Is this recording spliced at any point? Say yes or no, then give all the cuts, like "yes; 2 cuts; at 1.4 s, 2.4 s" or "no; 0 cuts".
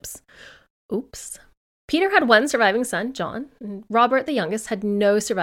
no; 0 cuts